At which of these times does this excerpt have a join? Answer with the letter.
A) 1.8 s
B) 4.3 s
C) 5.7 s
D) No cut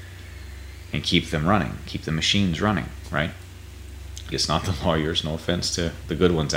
B